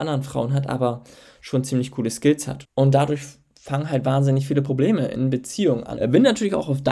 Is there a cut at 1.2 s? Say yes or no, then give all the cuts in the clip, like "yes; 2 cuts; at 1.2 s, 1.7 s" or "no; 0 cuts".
no; 2 cuts; at 2.6 s, 6.0 s